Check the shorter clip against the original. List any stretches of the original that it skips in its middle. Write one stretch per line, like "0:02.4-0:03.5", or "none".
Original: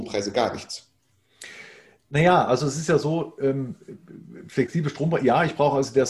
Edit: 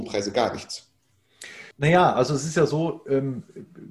0:01.7-0:02.0